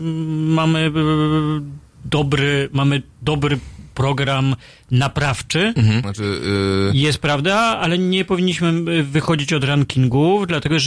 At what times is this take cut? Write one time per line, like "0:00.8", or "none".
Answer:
0:06.0